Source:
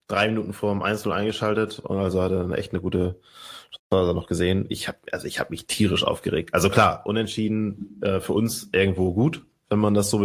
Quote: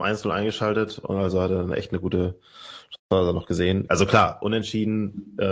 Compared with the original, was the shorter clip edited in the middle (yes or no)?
yes